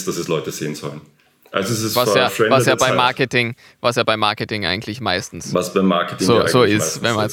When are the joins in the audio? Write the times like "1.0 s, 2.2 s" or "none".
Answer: none